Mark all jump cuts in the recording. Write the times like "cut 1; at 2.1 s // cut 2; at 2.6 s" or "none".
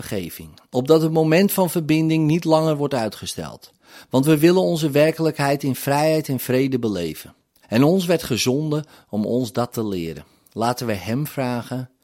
cut 1; at 7.6 s